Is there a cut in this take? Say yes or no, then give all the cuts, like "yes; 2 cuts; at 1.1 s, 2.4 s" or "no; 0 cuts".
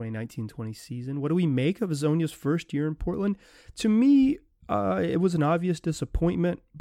no; 0 cuts